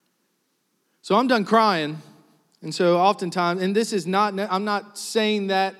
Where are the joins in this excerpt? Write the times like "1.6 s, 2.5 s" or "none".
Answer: none